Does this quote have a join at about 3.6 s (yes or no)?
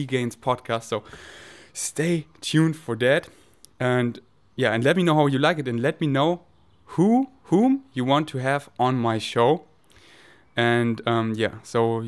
no